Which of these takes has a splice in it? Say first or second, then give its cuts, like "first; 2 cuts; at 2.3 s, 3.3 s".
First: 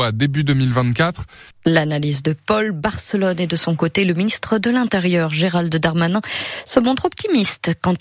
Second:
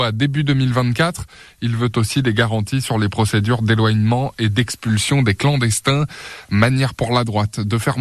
first; 1 cut; at 1.5 s